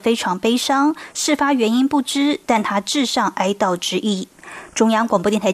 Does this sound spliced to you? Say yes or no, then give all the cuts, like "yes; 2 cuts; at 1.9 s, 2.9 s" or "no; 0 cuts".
no; 0 cuts